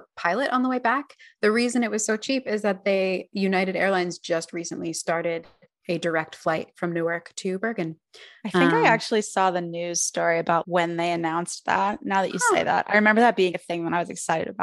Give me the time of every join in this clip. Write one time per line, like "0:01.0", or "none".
0:10.6
0:13.5